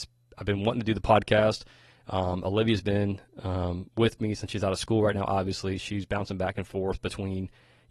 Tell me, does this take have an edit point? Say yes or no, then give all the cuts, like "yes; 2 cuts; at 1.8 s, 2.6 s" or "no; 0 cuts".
no; 0 cuts